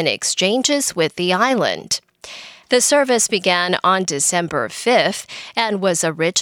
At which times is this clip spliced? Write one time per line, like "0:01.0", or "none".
0:02.6